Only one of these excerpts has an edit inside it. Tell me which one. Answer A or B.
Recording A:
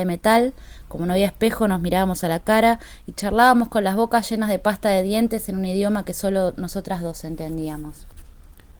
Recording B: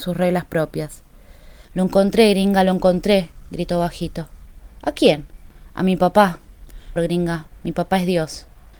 B